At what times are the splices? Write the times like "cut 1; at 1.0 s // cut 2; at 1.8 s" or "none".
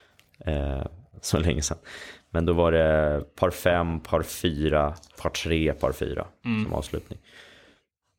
cut 1; at 1.2 s // cut 2; at 5.2 s